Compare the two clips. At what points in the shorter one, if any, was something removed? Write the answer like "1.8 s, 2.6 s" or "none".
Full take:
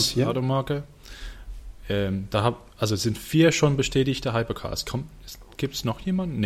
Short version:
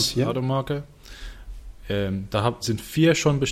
2.6 s